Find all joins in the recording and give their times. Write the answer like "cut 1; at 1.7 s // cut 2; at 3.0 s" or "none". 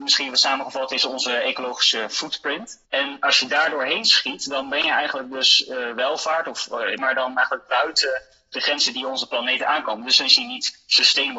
cut 1; at 2.9 s // cut 2; at 7.0 s